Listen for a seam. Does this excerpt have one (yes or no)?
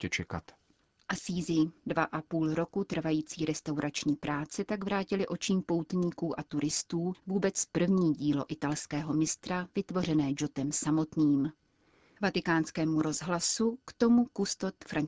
yes